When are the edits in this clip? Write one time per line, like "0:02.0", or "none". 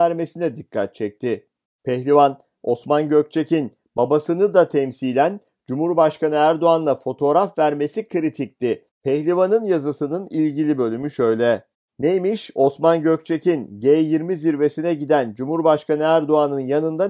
0:08.9